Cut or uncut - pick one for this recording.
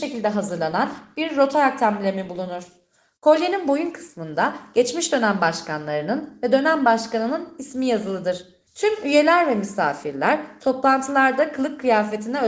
cut